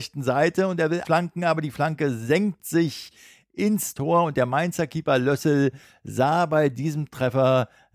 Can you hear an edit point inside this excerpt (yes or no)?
yes